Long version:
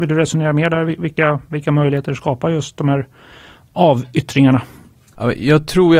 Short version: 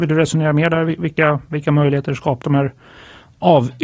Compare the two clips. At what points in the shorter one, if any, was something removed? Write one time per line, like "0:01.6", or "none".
0:02.4